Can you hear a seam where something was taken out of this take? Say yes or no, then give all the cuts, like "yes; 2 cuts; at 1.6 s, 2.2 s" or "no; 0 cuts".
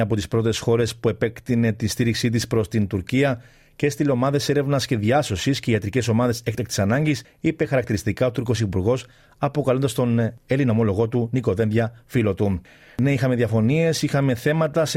no; 0 cuts